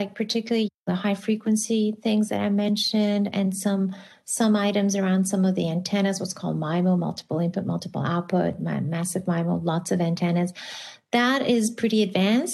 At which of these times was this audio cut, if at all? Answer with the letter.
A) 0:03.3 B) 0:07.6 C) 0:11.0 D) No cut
D